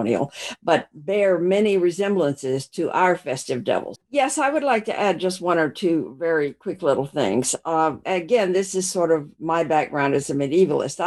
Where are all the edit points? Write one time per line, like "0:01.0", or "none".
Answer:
0:03.9
0:08.0

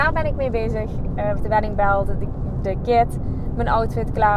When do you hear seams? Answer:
0:01.4

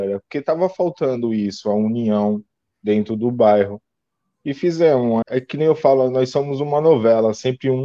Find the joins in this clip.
0:05.2

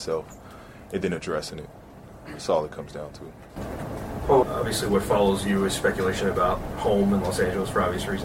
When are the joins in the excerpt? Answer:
0:04.4

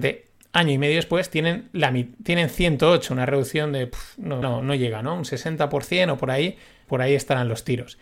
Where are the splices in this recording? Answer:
0:04.4
0:06.9

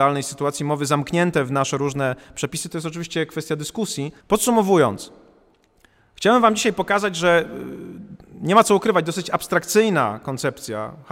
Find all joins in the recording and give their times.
0:04.2

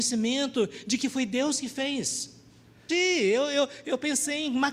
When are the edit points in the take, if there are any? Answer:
0:02.9

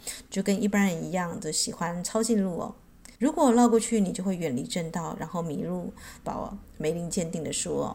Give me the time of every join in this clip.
0:03.2
0:06.2

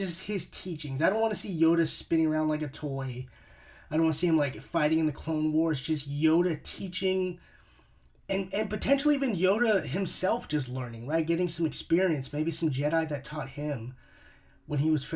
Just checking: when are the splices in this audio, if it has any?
none

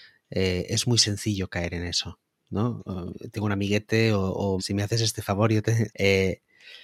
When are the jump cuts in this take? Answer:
0:04.6
0:05.9

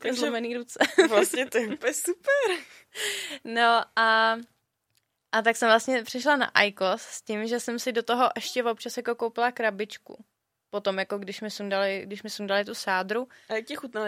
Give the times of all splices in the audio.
none

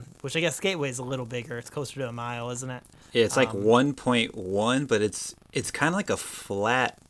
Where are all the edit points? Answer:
none

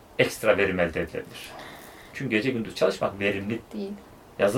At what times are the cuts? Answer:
0:02.1
0:03.6

